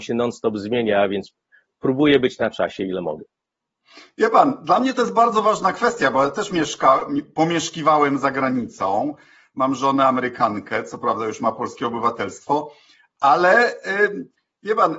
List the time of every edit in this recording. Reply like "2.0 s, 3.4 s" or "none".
none